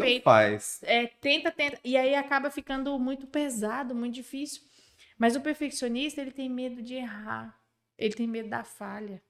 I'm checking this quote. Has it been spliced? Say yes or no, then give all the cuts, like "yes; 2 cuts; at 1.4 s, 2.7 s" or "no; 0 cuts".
no; 0 cuts